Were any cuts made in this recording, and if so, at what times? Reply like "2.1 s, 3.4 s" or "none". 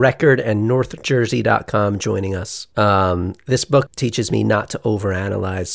3.9 s